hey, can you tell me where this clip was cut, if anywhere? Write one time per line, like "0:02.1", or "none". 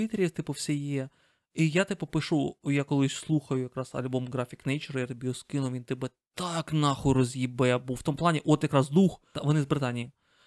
0:09.3